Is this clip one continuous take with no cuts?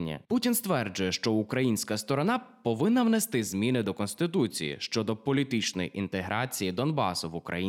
yes; 0 cuts

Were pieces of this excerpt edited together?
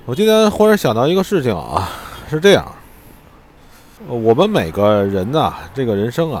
yes; 1 cut; at 4.0 s

